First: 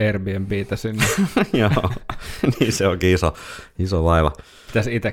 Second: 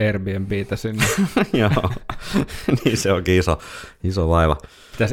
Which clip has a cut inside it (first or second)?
first